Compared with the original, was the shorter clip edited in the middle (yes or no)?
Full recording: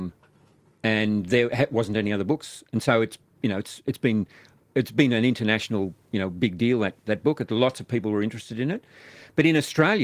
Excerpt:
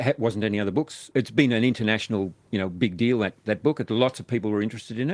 yes